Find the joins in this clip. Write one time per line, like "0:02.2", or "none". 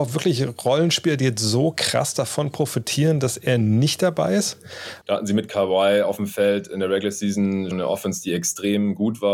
0:05.0
0:07.7